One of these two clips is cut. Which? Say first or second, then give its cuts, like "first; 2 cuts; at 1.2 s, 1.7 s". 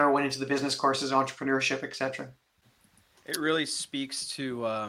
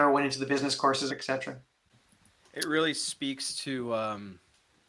second; 1 cut; at 1.1 s